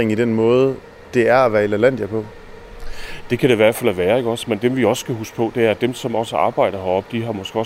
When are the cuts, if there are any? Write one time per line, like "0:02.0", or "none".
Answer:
none